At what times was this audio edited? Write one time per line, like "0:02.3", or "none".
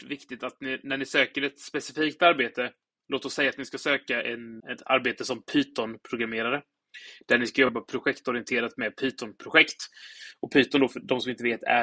0:04.6